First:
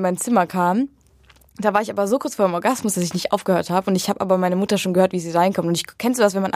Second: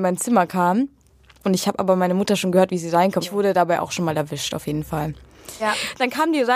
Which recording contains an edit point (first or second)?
second